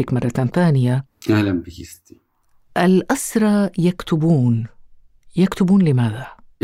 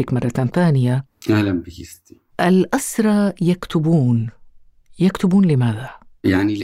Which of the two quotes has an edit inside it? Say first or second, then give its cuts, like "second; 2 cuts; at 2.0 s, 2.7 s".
second; 1 cut; at 2.3 s